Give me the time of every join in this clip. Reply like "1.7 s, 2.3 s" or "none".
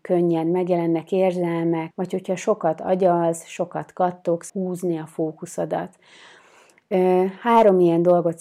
1.9 s, 4.5 s